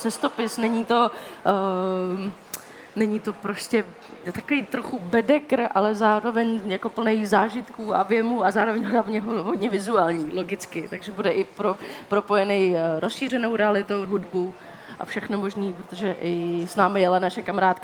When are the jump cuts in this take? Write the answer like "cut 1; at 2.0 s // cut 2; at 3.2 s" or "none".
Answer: cut 1; at 14.1 s